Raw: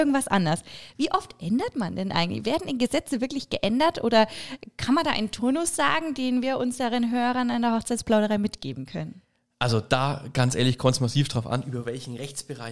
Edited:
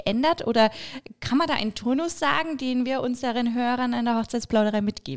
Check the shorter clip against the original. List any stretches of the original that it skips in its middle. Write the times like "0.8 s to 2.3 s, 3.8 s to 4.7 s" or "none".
none